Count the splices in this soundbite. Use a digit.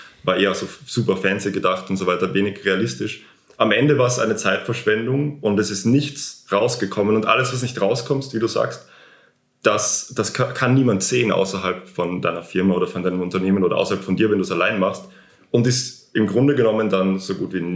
0